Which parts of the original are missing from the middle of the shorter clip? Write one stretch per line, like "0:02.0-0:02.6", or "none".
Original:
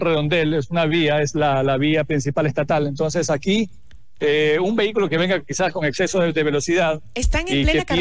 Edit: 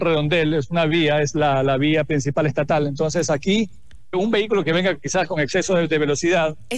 0:04.1-0:04.6

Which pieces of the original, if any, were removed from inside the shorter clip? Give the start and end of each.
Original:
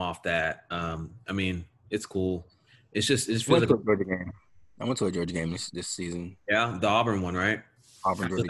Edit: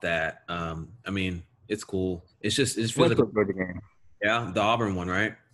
0:02.6-0:02.8
0:04.7-0:06.4

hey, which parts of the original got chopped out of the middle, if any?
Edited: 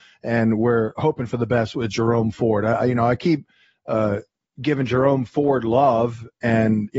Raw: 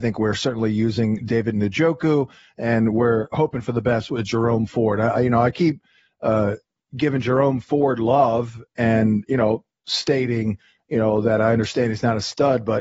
none

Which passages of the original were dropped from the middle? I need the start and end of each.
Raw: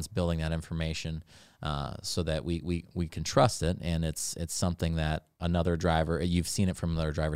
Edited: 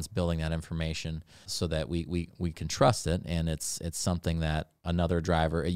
0:01.4-0:02.0

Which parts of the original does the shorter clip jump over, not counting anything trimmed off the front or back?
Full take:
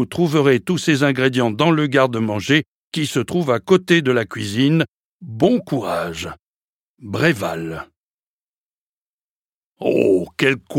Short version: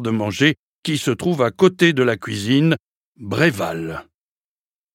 0:05.1-0:06.8

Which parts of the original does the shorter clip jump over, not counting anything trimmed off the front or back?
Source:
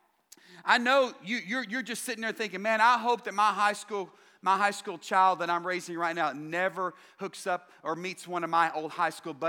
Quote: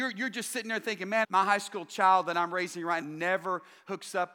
0:02.8-0:04.4
0:06.1-0:06.3

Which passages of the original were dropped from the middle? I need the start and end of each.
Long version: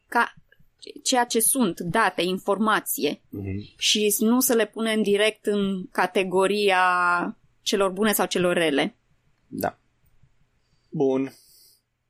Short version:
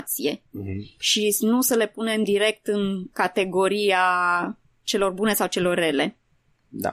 none

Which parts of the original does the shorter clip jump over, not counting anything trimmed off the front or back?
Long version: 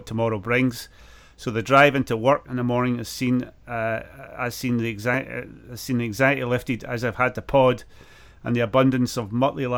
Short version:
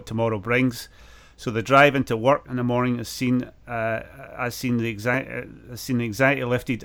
none

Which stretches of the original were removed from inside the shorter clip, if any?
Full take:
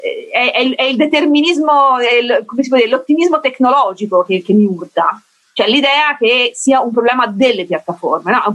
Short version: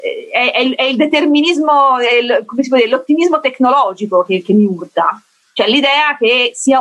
none

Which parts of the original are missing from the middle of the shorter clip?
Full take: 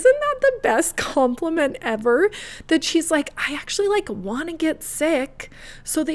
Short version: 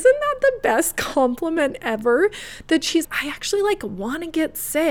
0:03.0-0:03.3

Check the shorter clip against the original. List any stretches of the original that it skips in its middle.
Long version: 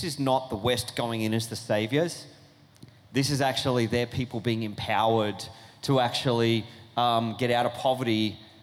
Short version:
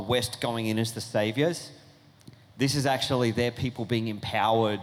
none

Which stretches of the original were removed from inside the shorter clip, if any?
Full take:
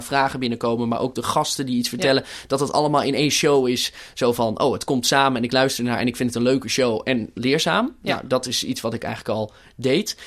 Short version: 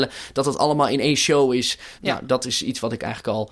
0:04.1-0:08.0

